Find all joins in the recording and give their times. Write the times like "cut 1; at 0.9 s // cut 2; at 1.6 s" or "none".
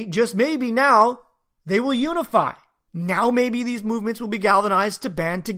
none